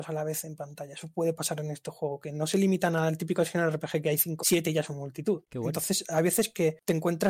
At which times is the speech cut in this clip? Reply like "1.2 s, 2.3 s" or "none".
4.4 s, 5.5 s